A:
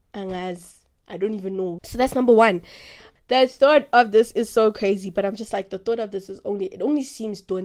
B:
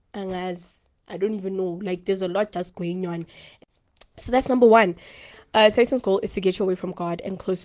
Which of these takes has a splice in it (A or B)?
A